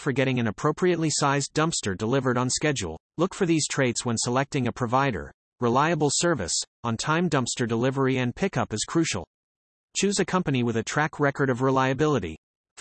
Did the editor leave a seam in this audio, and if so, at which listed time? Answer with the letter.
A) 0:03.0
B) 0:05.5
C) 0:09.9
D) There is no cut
A